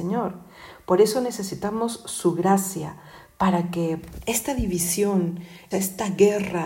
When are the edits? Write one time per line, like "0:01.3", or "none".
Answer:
0:05.7

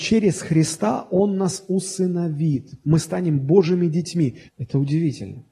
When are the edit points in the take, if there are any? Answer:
0:04.5

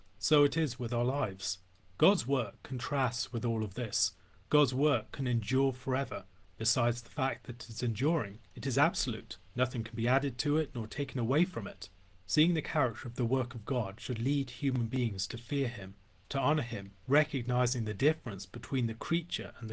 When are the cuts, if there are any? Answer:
none

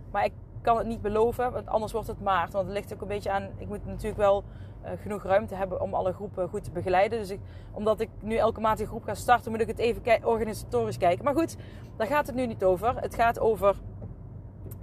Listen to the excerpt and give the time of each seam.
none

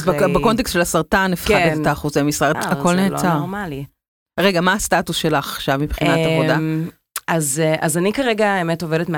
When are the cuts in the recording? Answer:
0:02.5

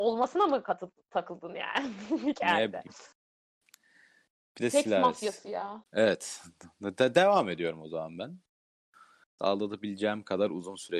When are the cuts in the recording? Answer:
0:05.8
0:09.4

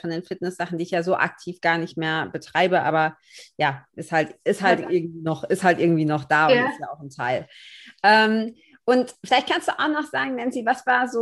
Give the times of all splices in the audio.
none

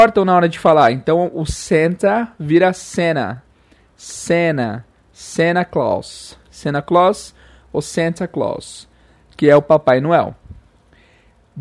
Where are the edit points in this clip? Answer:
none

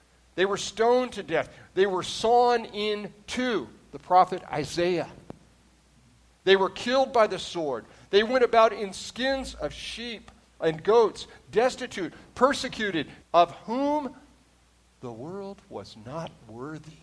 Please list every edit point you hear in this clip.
0:13.2

